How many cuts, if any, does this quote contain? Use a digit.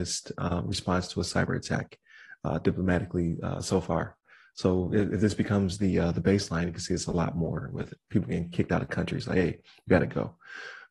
0